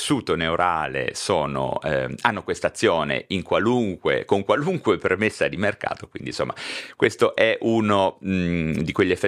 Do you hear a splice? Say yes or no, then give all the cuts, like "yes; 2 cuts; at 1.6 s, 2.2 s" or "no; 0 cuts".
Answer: no; 0 cuts